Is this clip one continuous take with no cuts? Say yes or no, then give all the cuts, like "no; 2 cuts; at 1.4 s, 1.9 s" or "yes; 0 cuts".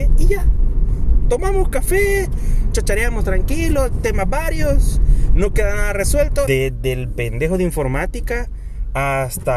no; 2 cuts; at 2.7 s, 6.5 s